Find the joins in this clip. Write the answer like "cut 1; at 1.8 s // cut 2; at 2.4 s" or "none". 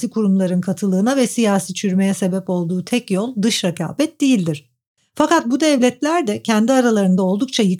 cut 1; at 5.0 s